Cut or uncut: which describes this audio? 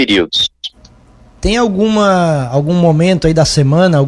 cut